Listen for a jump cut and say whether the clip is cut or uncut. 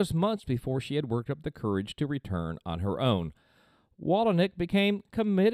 uncut